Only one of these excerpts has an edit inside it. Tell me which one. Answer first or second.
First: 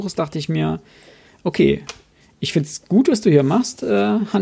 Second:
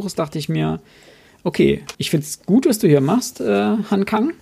second